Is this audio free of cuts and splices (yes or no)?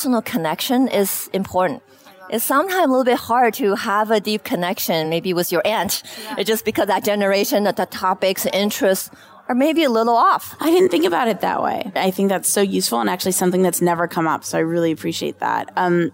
yes